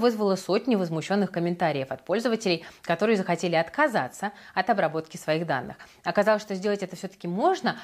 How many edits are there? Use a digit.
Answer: 0